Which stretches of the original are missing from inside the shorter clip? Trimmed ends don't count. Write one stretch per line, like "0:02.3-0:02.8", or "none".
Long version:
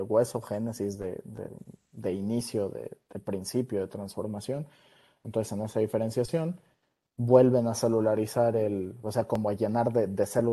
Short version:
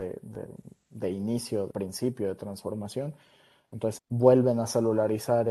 0:02.7-0:03.2
0:05.5-0:07.0